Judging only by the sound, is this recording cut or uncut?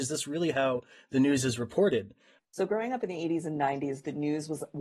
cut